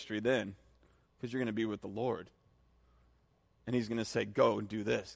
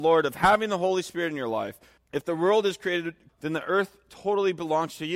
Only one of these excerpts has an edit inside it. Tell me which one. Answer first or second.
second